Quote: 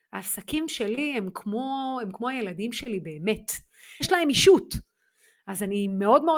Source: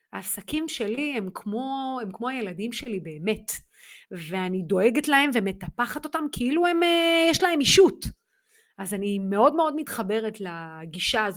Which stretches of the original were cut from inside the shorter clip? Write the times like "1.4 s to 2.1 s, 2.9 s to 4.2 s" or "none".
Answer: 4.0 s to 7.3 s